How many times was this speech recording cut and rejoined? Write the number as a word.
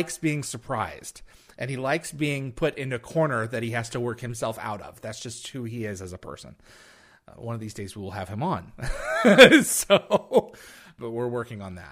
one